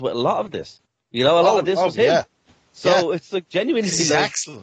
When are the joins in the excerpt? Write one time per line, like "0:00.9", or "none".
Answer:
none